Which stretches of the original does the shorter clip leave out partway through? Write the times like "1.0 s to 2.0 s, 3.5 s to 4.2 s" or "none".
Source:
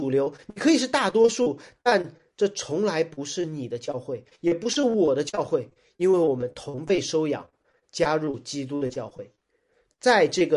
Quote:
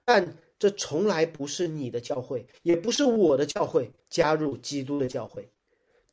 5.8 s to 7.8 s